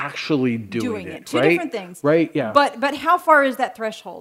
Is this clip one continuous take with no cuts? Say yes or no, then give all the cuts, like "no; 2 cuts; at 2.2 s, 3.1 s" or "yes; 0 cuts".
yes; 0 cuts